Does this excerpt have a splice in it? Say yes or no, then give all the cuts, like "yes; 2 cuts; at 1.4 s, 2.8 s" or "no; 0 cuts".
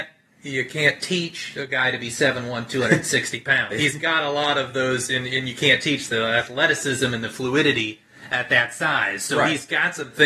yes; 1 cut; at 3.7 s